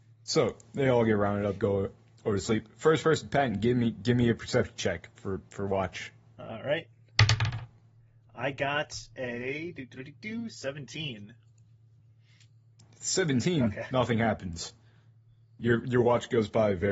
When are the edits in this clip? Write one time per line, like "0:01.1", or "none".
none